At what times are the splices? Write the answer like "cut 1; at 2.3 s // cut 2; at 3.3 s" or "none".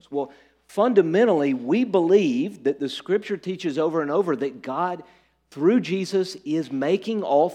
none